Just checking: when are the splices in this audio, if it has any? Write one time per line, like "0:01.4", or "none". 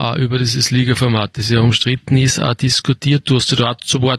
none